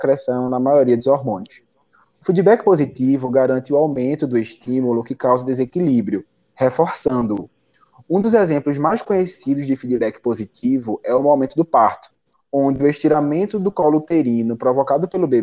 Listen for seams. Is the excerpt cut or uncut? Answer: uncut